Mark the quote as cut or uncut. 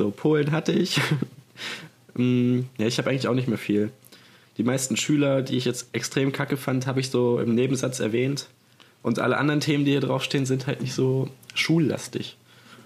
uncut